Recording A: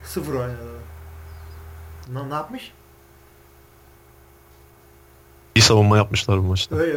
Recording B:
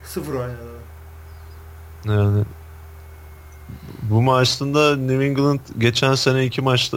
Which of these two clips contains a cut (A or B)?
A